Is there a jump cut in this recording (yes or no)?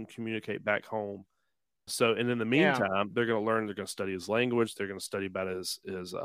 yes